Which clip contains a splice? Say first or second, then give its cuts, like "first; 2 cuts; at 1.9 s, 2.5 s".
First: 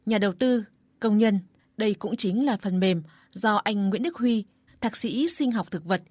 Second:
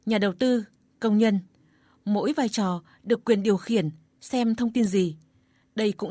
first; 2 cuts; at 1.6 s, 4.7 s